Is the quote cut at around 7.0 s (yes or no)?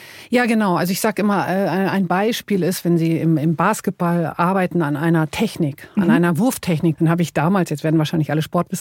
yes